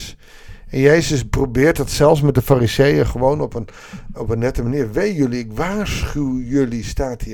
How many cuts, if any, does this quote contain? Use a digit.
1